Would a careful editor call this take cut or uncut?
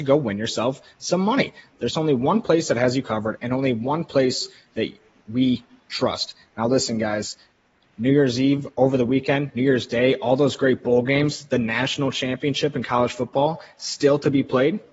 uncut